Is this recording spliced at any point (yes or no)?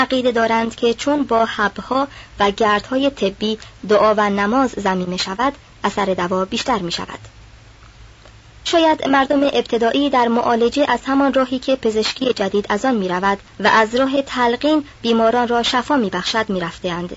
yes